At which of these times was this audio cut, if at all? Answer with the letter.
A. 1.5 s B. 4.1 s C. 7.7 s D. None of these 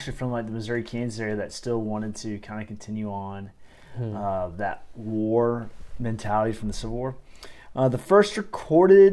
D